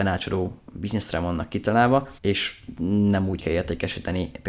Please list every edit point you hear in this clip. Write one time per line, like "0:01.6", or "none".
0:02.2